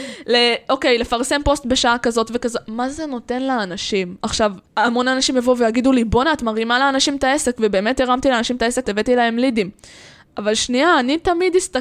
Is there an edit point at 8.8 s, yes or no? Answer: yes